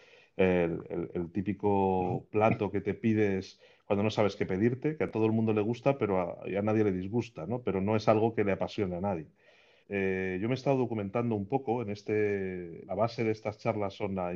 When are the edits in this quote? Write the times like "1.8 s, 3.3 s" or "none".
9.8 s, 12.8 s